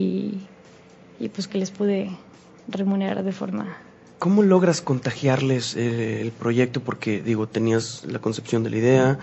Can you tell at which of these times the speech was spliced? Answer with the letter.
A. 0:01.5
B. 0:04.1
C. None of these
A